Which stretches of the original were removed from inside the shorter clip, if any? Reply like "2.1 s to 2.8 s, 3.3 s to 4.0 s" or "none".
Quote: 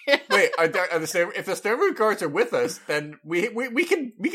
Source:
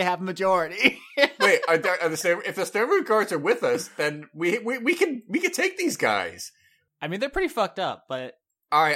none